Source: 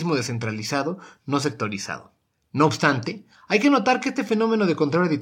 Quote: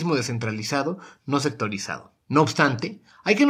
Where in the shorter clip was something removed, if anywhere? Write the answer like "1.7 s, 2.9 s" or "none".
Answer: 2.2 s